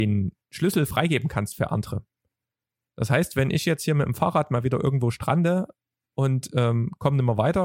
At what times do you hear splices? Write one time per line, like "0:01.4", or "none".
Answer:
none